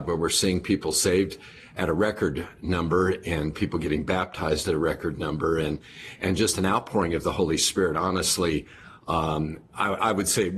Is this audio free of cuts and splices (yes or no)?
yes